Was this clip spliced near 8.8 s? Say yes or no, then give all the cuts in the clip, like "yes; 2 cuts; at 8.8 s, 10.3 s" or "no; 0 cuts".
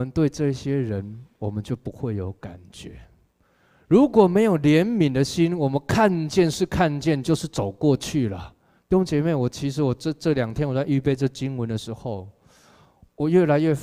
yes; 1 cut; at 8.8 s